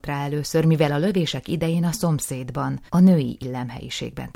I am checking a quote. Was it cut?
yes; 1 cut; at 2.9 s

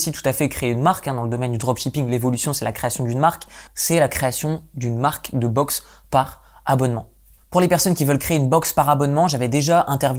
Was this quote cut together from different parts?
yes; 1 cut; at 3.7 s

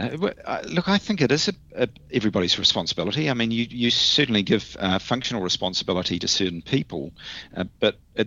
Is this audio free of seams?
yes; 0 cuts

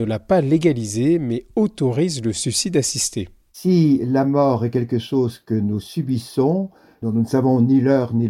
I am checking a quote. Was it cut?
no; 0 cuts

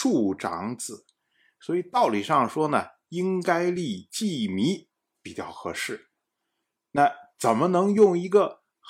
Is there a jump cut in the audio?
no; 0 cuts

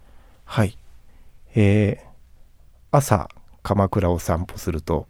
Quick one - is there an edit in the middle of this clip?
no; 0 cuts

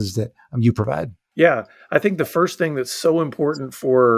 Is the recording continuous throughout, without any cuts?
yes; 0 cuts

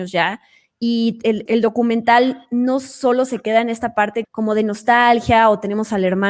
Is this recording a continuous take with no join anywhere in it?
no; 2 cuts; at 1.5 s, 4.2 s

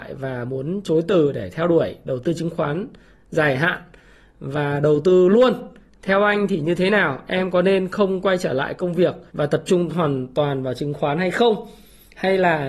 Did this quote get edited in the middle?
yes; 1 cut; at 9.3 s

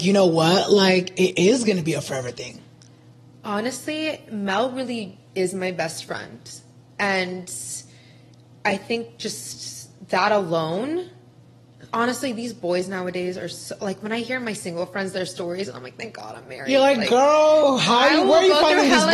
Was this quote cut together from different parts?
no; 0 cuts

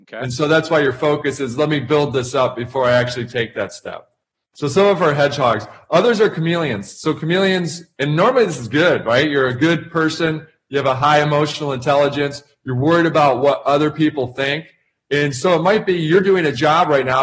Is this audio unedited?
yes; 0 cuts

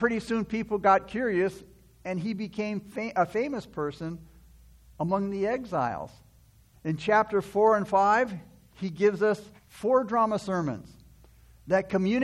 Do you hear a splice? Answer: yes; 2 cuts; at 6.7 s, 9.6 s

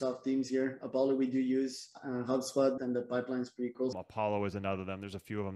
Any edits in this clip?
yes; 2 cuts; at 2.8 s, 3.9 s

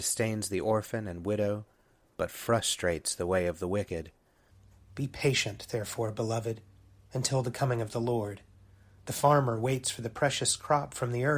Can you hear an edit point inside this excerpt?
yes; 1 cut; at 4.9 s

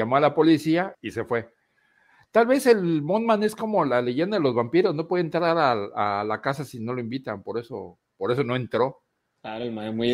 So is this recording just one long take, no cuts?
no; 1 cut; at 0.9 s

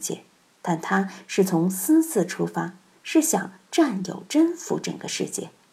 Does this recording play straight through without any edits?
yes; 0 cuts

